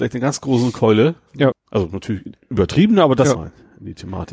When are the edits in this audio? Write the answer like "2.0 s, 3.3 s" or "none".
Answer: 1.5 s, 3.3 s